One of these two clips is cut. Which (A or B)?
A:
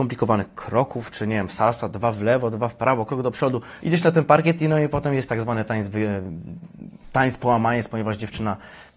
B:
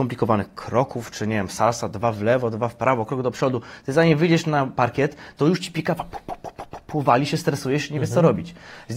A